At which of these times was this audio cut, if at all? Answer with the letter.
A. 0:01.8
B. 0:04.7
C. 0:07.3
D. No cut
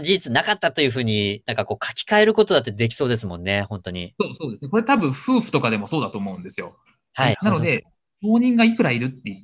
C